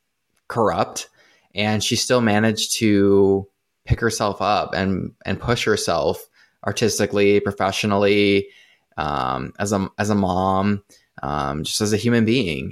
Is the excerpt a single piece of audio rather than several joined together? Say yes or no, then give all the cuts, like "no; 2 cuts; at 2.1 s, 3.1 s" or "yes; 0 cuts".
yes; 0 cuts